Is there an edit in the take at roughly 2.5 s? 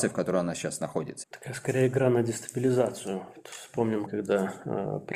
no; 2 cuts; at 1.2 s, 4.1 s

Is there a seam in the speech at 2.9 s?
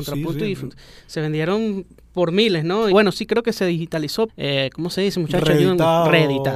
yes; 2 cuts; at 2.9 s, 4.3 s

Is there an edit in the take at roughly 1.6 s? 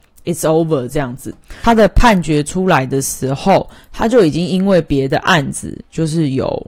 yes; 1 cut; at 1.6 s

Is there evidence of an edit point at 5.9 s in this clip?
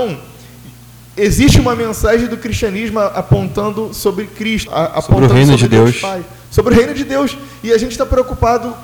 no; 1 cut; at 4.7 s

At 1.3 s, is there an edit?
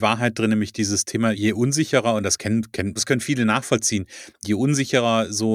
yes; 2 cuts; at 1.3 s, 3.0 s

